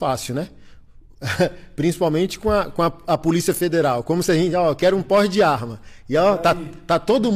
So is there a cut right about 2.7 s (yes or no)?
no